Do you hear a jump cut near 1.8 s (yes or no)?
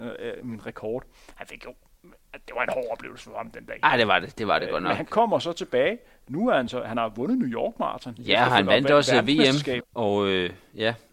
no